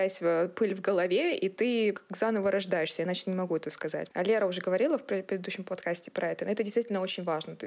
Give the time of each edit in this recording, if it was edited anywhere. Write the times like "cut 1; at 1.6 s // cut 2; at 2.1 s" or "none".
cut 1; at 1.9 s // cut 2; at 4.1 s